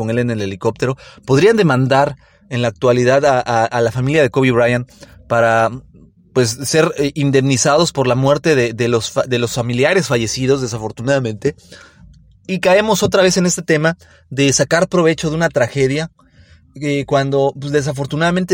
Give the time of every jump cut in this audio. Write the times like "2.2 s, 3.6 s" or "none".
none

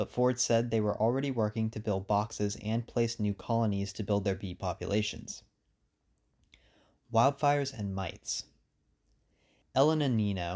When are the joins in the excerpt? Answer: none

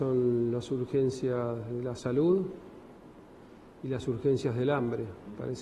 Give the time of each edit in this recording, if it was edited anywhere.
none

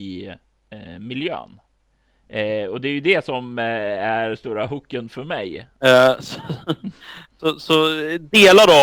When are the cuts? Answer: 5.8 s

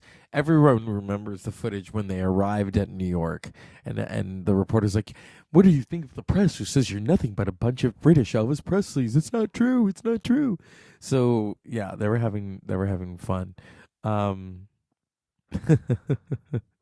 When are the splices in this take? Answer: none

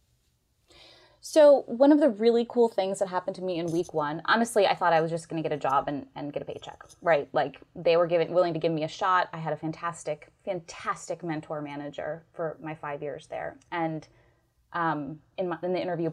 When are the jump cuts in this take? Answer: none

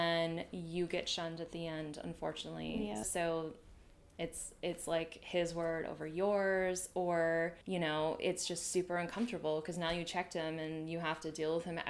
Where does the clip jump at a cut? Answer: 3.0 s, 7.6 s

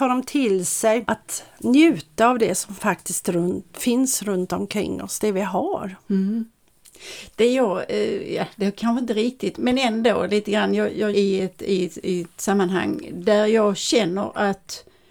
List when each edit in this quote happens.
9.6 s, 11.1 s

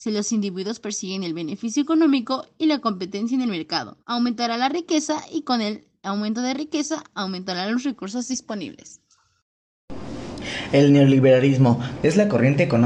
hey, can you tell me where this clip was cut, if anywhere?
4.0 s, 12.0 s

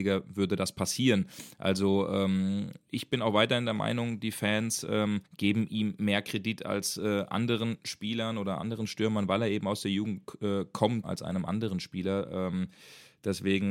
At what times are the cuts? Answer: 5.3 s, 11.0 s

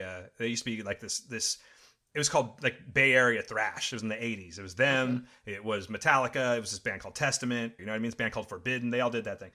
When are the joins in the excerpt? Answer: 7.8 s

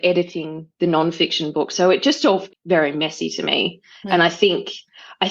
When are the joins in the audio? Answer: 2.5 s

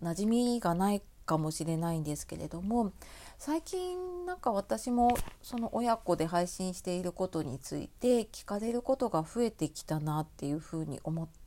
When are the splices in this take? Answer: none

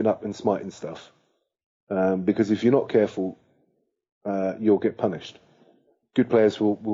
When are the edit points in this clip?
none

